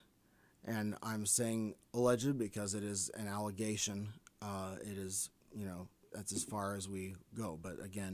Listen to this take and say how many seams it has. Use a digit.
1